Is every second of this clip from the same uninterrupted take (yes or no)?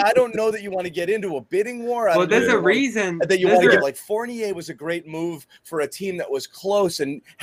no